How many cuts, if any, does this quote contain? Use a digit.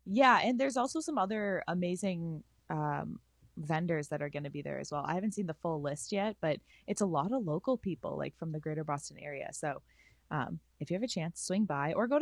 0